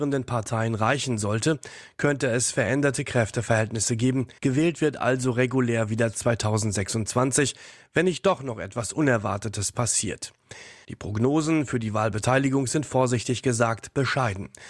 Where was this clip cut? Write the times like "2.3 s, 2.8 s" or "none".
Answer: 4.4 s, 10.8 s